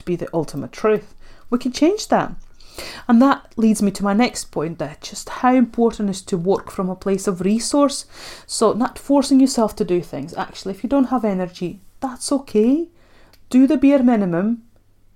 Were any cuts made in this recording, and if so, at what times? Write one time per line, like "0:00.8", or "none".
none